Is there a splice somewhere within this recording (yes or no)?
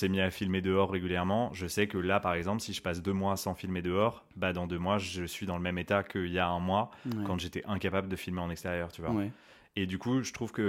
no